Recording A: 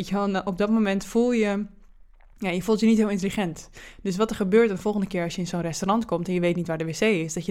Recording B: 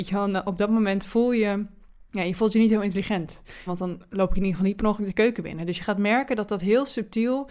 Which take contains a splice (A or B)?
B